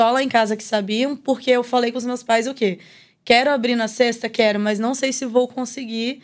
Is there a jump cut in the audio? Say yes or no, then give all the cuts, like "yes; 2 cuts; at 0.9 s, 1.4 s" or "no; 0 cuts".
no; 0 cuts